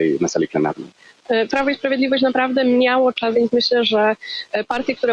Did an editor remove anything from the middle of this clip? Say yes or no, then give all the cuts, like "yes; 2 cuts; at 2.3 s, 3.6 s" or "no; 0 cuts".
yes; 2 cuts; at 1.5 s, 3.3 s